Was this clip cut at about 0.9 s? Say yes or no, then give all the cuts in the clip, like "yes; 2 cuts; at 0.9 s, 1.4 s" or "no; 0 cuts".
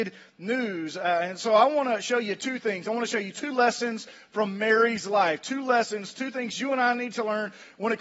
no; 0 cuts